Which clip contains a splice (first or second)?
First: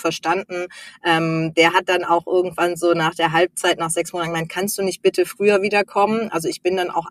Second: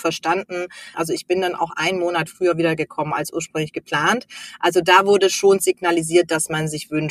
second